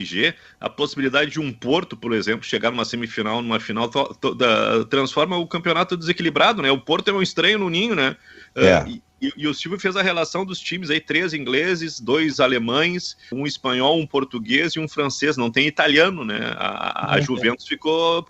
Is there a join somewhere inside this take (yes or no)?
yes